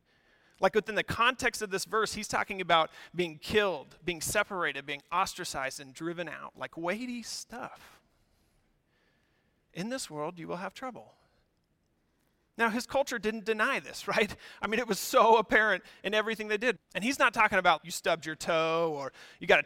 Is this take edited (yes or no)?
yes